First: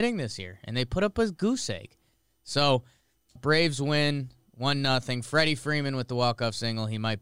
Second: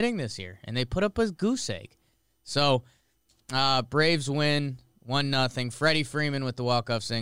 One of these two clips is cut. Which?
first; 1 cut; at 3.4 s

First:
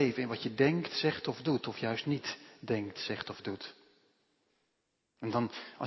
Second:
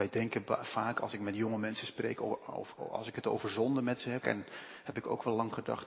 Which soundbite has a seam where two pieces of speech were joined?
second; 2 cuts; at 2.8 s, 4.2 s

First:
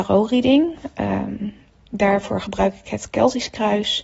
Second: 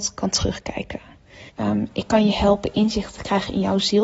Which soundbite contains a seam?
second; 1 cut; at 1.5 s

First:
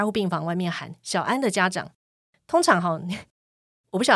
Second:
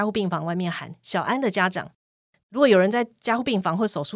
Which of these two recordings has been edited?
second; 1 cut; at 2.4 s

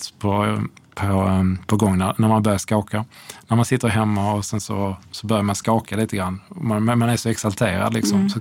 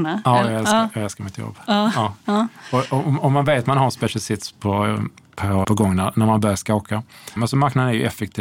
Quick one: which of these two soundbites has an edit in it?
second; 2 cuts; at 5.6 s, 7.4 s

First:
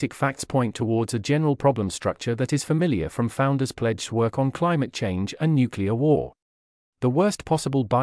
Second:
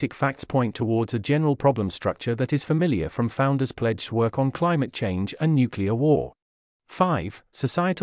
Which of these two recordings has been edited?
second; 1 cut; at 6.7 s

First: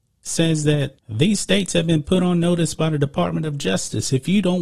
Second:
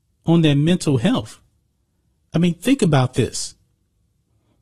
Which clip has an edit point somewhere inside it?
first; 1 cut; at 1.0 s

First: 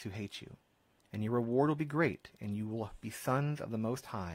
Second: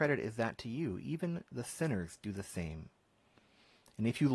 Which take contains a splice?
first; 1 cut; at 1.0 s

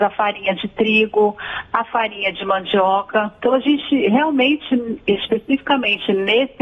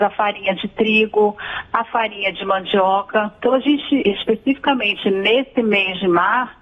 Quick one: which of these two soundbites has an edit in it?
second; 1 cut; at 4.0 s

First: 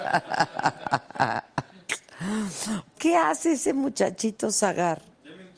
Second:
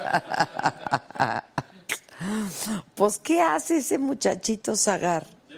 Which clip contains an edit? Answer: first; 1 cut; at 2.9 s

